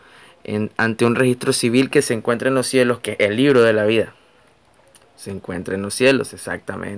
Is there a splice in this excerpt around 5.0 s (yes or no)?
yes